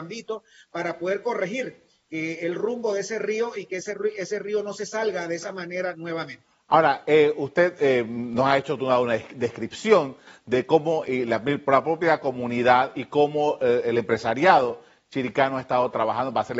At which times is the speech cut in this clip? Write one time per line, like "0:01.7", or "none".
none